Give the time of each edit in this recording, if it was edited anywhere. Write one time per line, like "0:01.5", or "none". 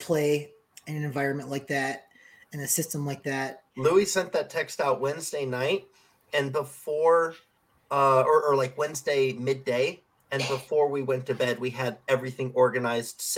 0:03.7